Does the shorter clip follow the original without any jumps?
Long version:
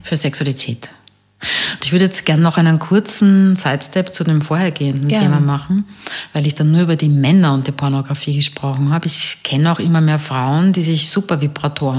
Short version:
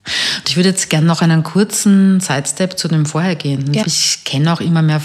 no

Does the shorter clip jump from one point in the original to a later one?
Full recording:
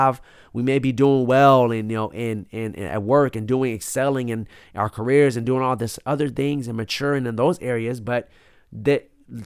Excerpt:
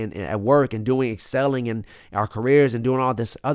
no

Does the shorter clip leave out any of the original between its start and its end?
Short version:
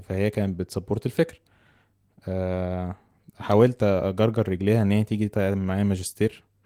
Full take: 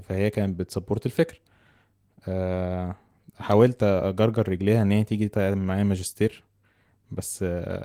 no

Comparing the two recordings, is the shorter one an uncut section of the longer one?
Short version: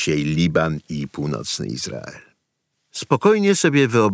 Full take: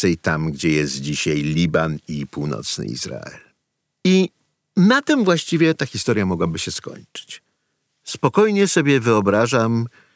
no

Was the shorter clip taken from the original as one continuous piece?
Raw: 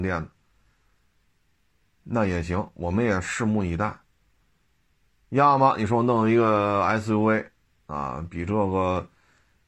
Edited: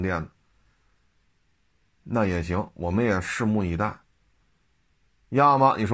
yes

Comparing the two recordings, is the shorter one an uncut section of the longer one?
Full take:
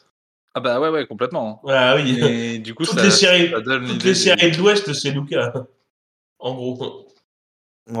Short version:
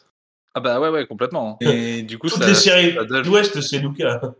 no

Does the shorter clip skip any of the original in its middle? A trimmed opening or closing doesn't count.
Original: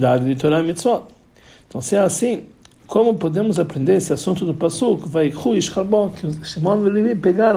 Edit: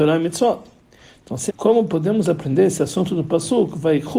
yes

